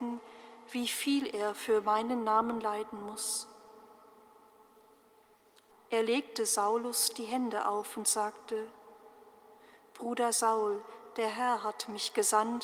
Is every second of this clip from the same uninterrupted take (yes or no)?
no